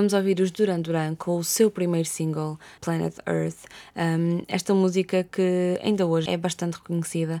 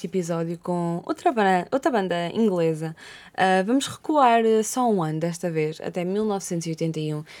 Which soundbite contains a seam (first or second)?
first